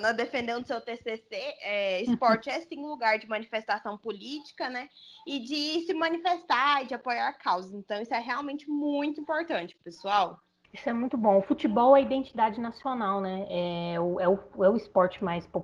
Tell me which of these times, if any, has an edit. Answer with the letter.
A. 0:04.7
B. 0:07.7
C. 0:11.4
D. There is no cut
D